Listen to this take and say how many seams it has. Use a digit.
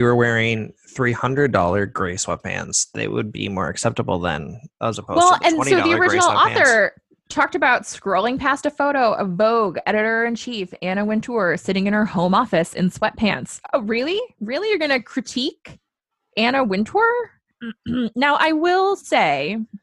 1